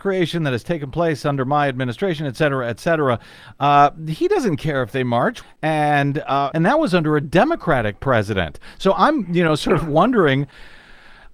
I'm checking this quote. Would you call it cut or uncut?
cut